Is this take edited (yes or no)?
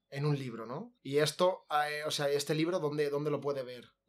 yes